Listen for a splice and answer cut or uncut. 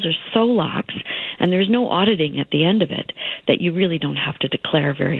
uncut